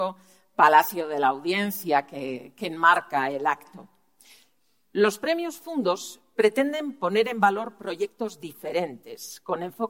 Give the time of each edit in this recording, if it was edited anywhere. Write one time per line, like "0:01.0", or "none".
none